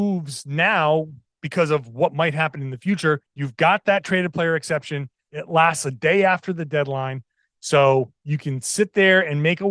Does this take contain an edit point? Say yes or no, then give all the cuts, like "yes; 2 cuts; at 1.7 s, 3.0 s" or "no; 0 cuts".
yes; 1 cut; at 3.3 s